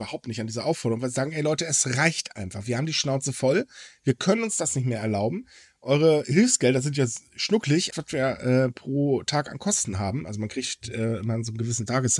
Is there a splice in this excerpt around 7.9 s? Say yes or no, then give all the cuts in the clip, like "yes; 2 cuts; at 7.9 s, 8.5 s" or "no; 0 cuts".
yes; 1 cut; at 7.9 s